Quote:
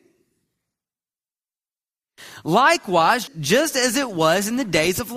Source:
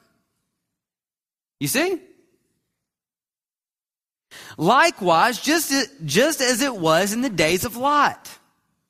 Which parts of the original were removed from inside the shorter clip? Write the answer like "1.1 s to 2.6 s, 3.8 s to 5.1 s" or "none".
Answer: 5.4 s to 5.9 s